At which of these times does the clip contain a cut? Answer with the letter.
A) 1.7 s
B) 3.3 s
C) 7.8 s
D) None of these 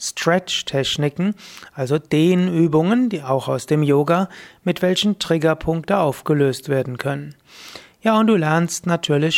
D